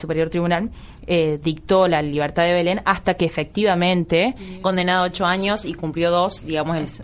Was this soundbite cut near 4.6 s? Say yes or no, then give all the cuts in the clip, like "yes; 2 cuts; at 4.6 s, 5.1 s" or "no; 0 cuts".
yes; 1 cut; at 4.6 s